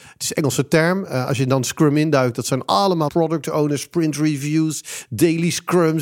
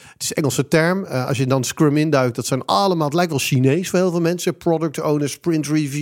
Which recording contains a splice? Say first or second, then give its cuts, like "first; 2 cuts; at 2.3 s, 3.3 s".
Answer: first; 1 cut; at 3.1 s